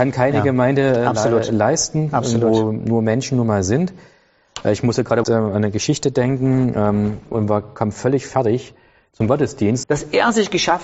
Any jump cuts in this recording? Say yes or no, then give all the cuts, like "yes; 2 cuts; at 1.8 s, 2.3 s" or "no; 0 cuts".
yes; 3 cuts; at 5.2 s, 7.3 s, 9.8 s